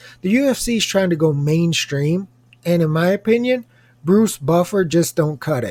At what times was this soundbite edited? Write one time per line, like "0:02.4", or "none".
none